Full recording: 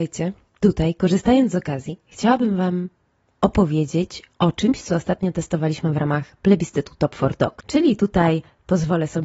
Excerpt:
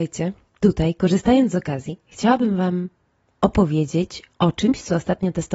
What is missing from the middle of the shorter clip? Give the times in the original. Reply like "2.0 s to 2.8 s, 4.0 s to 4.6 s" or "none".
none